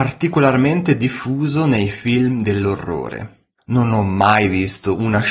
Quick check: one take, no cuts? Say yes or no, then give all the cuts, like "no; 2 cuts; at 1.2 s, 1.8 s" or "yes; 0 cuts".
no; 1 cut; at 3.5 s